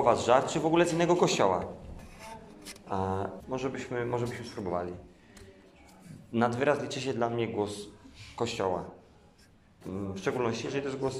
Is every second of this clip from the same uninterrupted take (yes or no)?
no